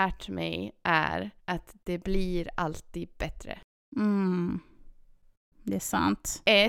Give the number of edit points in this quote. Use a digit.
1